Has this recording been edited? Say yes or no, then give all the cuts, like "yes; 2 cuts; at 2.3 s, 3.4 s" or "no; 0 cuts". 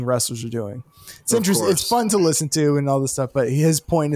no; 0 cuts